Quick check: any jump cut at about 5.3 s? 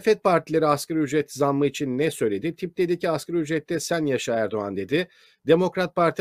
no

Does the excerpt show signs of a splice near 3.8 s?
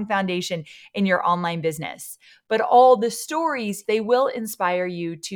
yes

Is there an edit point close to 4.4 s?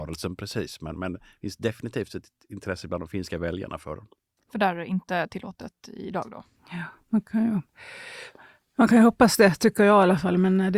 no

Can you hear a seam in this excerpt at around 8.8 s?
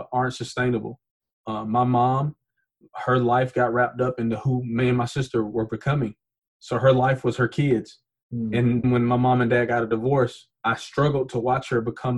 yes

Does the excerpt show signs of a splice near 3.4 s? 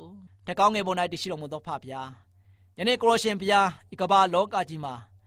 yes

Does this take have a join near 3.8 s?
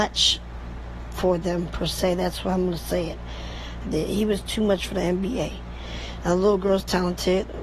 yes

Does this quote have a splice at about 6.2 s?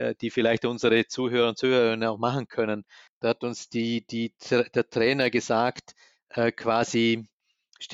no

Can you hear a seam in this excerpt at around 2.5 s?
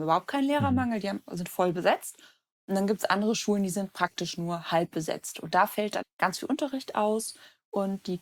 no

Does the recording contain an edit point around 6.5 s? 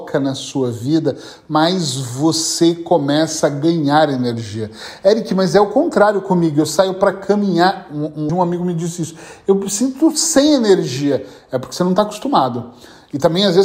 no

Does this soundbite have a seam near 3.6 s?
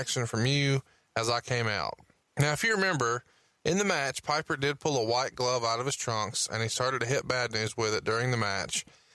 no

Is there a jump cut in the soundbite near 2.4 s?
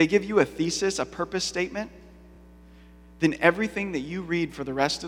no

